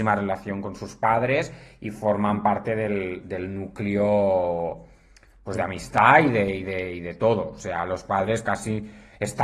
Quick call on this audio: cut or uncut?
uncut